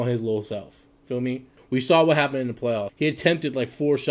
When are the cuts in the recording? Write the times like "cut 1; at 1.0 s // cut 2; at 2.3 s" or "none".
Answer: cut 1; at 1.6 s // cut 2; at 2.9 s

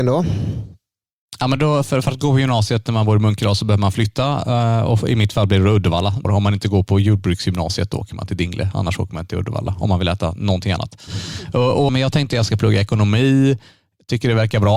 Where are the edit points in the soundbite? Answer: cut 1; at 6.2 s // cut 2; at 11.9 s

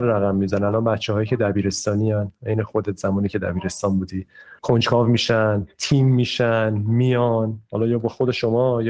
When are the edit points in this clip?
cut 1; at 4.6 s

